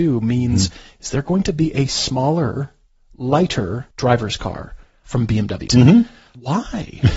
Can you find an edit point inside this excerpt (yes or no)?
yes